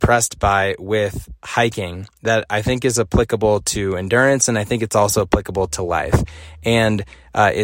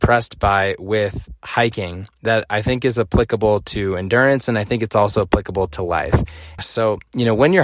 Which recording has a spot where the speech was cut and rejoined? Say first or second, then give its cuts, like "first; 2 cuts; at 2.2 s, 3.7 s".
second; 1 cut; at 6.6 s